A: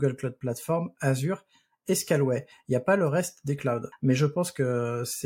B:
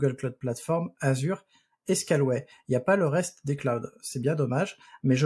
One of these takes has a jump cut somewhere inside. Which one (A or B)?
A